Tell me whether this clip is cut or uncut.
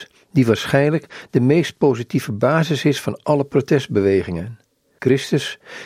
uncut